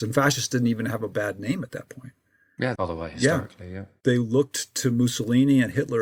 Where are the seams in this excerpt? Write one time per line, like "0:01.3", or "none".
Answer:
0:02.8